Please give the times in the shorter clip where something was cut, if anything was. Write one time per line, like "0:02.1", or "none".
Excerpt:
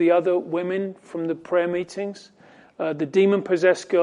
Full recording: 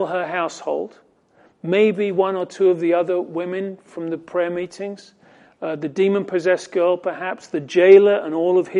none